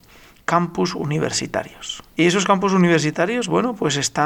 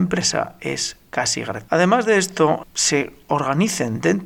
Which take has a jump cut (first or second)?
second